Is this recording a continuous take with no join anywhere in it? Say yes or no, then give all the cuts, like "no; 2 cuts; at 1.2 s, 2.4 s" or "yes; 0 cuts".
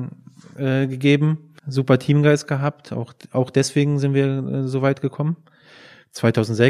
no; 1 cut; at 1.6 s